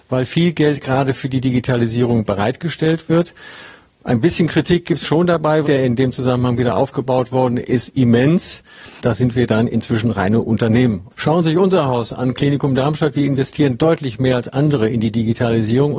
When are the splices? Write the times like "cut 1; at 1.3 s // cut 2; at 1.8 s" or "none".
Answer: cut 1; at 5.6 s // cut 2; at 9.0 s // cut 3; at 11.1 s